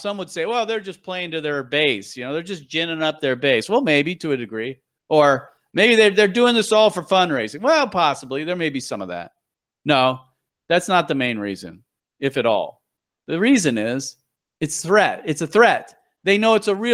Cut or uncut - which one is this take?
uncut